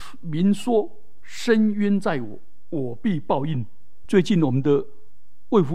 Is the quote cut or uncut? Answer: cut